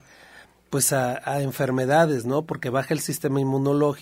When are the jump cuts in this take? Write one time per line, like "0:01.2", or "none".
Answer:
none